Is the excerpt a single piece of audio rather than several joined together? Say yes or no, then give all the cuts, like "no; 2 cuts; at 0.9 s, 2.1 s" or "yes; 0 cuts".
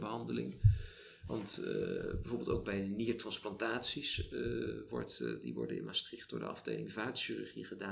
yes; 0 cuts